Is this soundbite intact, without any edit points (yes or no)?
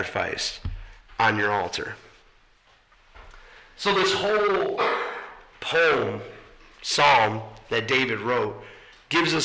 yes